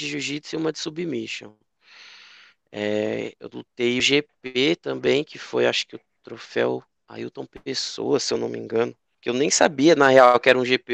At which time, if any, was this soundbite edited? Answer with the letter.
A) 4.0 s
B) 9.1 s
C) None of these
A